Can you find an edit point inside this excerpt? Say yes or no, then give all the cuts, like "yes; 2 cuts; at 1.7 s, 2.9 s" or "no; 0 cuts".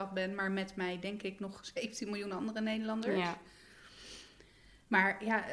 no; 0 cuts